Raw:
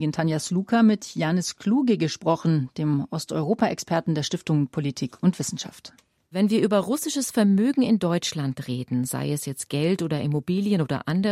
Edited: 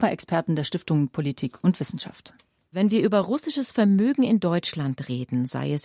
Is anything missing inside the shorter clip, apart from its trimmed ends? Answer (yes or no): no